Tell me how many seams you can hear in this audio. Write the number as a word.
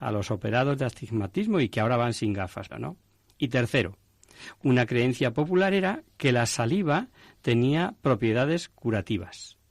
one